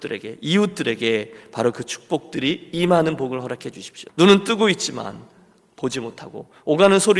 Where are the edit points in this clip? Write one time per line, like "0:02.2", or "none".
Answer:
0:04.1